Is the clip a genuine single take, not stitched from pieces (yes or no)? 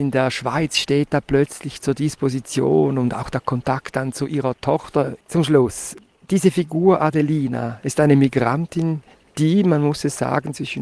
no